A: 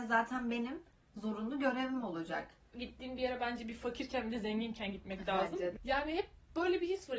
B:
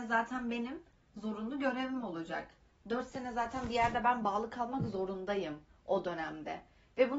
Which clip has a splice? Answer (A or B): A